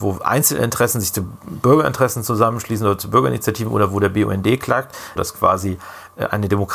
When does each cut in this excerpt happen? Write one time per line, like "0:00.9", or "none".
0:05.2